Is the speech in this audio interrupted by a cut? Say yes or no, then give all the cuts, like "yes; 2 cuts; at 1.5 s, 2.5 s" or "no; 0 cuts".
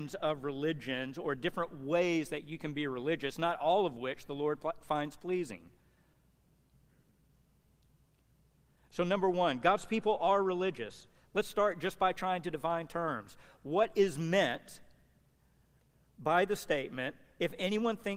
no; 0 cuts